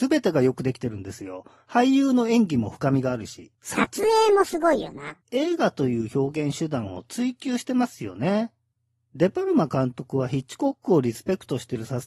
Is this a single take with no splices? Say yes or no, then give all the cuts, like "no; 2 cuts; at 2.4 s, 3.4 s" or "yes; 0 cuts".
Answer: yes; 0 cuts